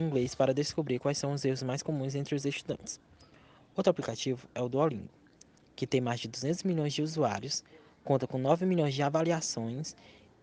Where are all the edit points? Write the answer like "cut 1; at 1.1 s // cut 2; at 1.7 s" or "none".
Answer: none